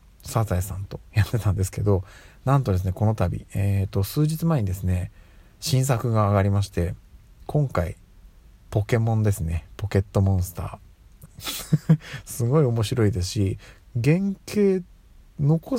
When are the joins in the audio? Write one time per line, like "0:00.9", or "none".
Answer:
0:11.3
0:13.8